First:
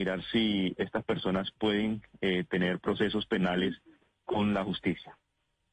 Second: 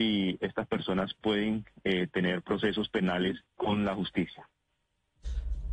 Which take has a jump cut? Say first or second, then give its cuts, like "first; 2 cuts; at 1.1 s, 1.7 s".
second; 1 cut; at 3.5 s